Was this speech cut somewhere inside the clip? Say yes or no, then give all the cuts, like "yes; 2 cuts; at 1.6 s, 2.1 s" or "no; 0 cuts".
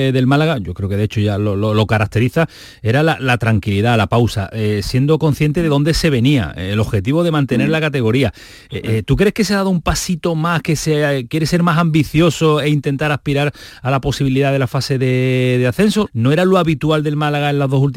yes; 1 cut; at 16.1 s